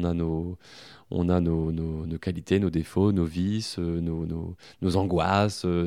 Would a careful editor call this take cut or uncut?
uncut